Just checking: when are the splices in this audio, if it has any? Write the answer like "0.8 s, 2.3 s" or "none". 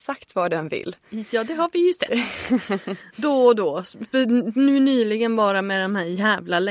none